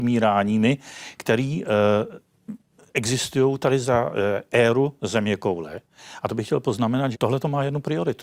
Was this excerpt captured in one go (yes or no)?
no